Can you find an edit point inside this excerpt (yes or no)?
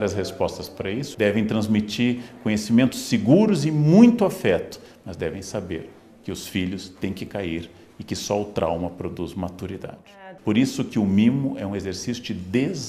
yes